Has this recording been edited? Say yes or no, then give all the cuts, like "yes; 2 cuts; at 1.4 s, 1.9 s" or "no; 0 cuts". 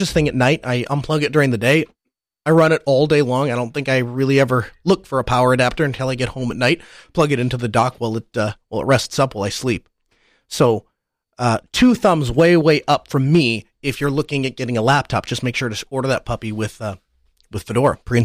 no; 0 cuts